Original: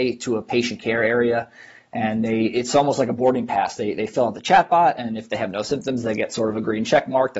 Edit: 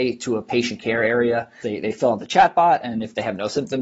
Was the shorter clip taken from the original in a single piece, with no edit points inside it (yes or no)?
no